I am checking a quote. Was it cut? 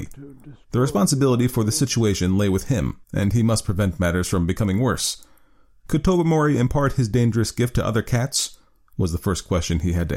yes; 1 cut; at 3.0 s

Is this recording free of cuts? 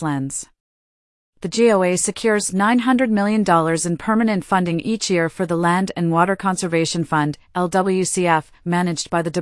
yes; 0 cuts

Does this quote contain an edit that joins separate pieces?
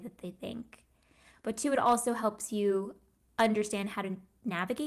no; 0 cuts

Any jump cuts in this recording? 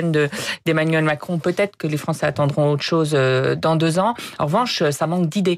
no; 0 cuts

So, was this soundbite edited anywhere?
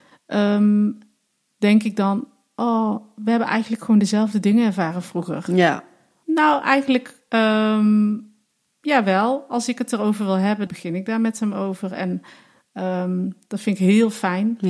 yes; 2 cuts; at 6.2 s, 10.7 s

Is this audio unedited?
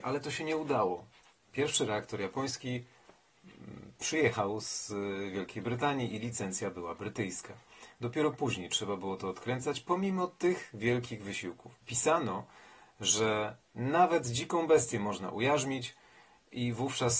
no; 2 cuts; at 11.8 s, 13.6 s

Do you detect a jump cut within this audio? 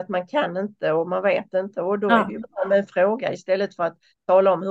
no; 0 cuts

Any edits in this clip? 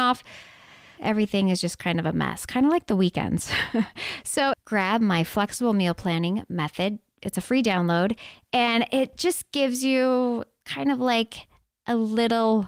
yes; 2 cuts; at 1.0 s, 4.5 s

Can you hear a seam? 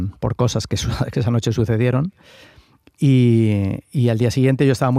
no; 0 cuts

